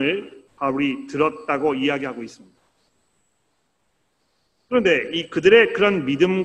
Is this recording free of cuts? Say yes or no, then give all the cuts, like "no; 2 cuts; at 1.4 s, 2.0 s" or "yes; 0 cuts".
yes; 0 cuts